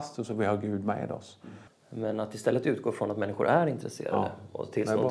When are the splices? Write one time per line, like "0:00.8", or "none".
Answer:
0:01.7